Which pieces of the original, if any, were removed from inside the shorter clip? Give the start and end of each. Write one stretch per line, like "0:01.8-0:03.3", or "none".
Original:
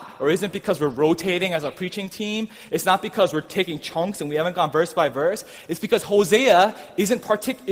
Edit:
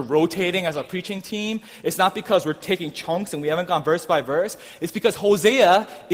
none

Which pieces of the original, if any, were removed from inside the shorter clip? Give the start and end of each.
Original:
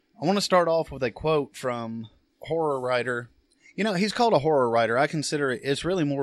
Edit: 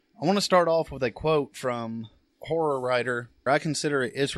0:03.5-0:04.9

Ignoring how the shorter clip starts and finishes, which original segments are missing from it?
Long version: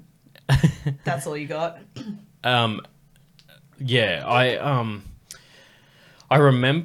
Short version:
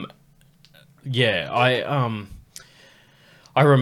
none

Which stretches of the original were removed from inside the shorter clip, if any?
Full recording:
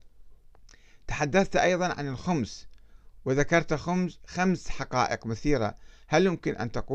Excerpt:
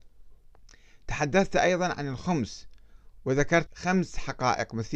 0:03.7-0:04.2

